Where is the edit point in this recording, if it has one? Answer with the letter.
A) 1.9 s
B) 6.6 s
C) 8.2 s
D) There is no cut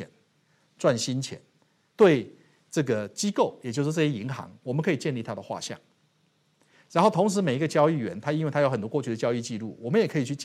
A